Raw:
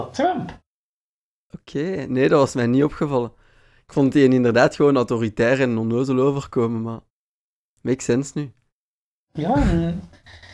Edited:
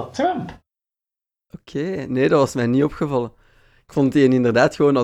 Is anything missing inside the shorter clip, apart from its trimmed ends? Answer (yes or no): no